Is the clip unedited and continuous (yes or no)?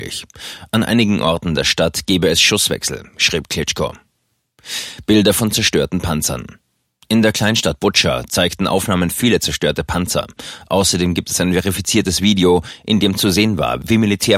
yes